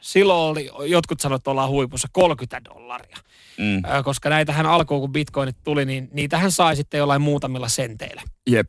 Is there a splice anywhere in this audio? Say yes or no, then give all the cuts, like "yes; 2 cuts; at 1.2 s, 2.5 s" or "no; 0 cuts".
no; 0 cuts